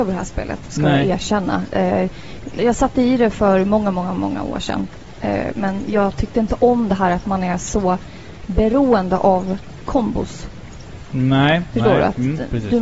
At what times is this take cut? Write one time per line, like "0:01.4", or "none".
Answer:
0:02.6